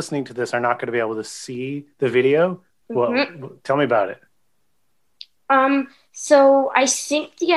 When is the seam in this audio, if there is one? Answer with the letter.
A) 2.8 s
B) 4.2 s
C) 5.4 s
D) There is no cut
A